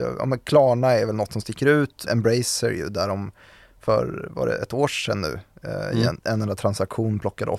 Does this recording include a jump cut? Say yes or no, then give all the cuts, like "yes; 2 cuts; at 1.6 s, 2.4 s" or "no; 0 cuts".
yes; 1 cut; at 2.1 s